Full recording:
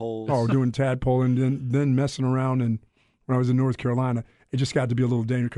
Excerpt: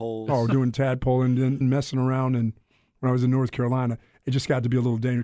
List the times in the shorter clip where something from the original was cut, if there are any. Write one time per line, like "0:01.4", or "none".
0:01.6